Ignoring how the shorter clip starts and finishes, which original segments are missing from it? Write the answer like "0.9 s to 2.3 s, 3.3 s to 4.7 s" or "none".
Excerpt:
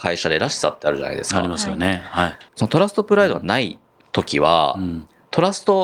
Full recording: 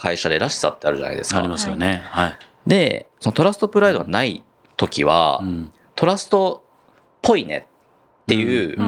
2.5 s to 3.1 s